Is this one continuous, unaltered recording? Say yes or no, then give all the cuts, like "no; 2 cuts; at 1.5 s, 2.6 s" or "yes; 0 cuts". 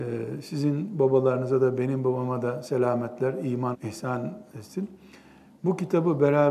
no; 1 cut; at 3.7 s